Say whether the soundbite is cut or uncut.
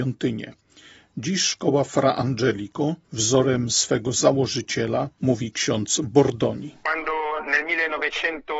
cut